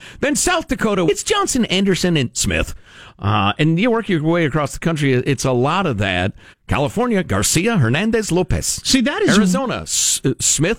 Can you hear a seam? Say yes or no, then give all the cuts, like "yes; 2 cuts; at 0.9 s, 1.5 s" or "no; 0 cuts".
yes; 2 cuts; at 1.1 s, 6.5 s